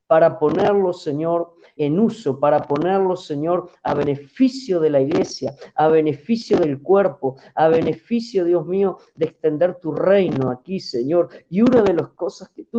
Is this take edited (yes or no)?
yes